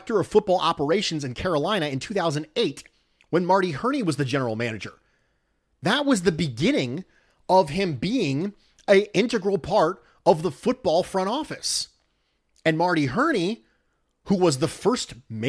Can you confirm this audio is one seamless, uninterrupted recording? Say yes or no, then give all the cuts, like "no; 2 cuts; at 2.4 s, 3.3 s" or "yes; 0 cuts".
yes; 0 cuts